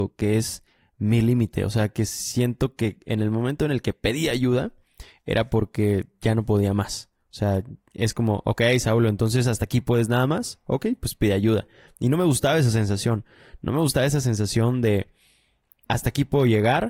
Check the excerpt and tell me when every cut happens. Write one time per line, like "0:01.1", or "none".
0:15.9